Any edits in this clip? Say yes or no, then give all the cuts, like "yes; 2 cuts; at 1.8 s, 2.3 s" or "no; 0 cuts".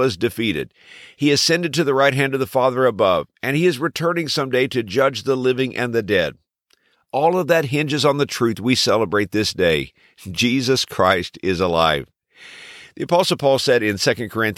no; 0 cuts